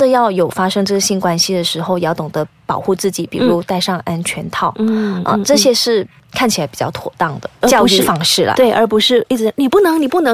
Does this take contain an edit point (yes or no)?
no